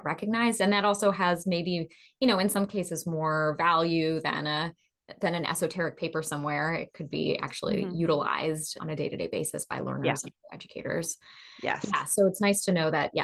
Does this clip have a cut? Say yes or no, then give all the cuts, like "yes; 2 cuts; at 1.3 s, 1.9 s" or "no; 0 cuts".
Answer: no; 0 cuts